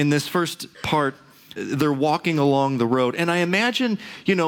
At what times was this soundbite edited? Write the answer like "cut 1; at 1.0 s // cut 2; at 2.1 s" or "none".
cut 1; at 1.6 s